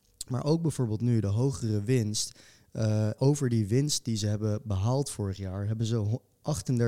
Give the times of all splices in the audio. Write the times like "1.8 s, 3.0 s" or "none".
3.2 s